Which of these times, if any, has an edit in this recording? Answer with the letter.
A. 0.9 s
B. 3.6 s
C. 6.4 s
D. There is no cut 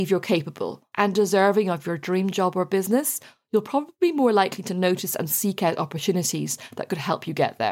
A